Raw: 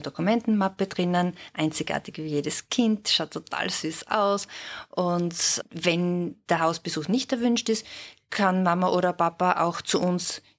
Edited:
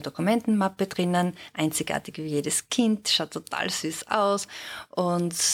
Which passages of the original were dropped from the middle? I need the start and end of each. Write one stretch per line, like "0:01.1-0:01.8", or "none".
none